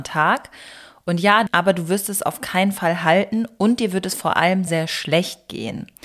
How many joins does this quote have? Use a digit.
2